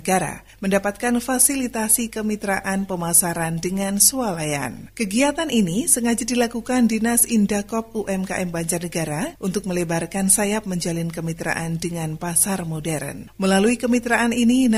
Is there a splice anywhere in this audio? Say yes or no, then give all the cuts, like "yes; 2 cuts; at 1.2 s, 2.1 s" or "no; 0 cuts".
no; 0 cuts